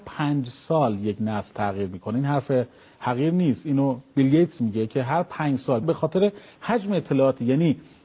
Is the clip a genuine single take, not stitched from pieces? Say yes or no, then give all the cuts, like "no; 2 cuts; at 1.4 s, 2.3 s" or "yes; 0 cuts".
no; 1 cut; at 5.8 s